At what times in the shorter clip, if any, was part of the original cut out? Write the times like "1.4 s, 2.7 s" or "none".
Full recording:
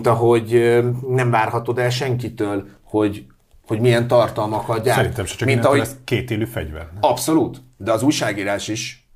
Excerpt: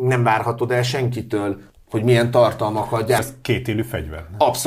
1.7 s, 3.2 s

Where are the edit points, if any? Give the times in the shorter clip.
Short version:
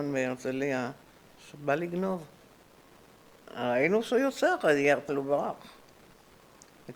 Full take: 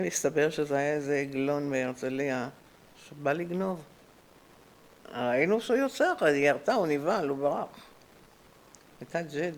5.1 s

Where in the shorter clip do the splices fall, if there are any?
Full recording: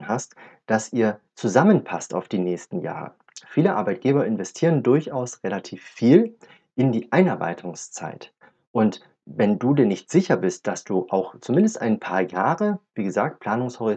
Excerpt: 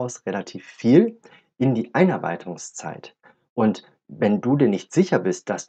none

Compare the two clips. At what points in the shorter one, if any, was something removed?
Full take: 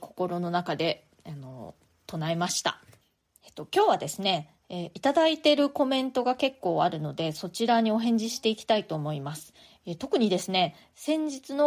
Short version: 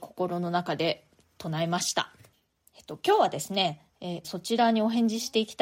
1.2 s, 4.2 s

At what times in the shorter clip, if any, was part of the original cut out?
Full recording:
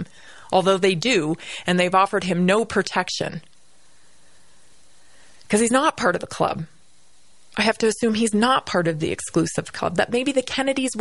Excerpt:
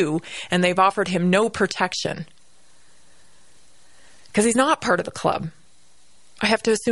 none

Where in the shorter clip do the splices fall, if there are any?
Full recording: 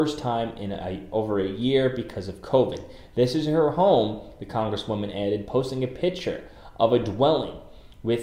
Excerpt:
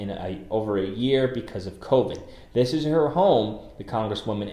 none

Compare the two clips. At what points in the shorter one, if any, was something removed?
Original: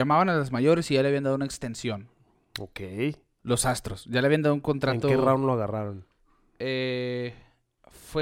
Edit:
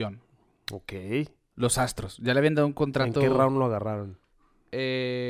none

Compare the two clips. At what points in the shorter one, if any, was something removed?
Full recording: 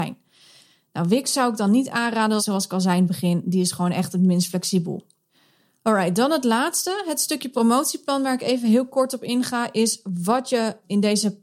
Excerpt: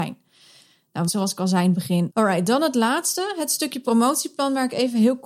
1.1 s, 2.1 s

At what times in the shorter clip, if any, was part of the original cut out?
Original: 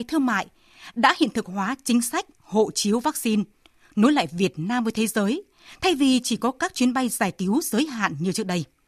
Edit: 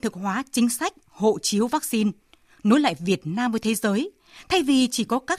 none

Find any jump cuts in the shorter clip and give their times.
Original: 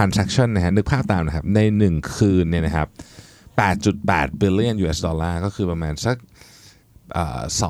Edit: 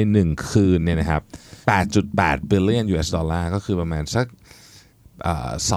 1.6 s

